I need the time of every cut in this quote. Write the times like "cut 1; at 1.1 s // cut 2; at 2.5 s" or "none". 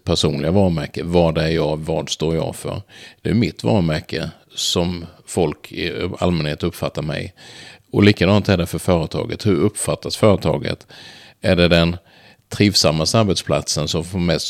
none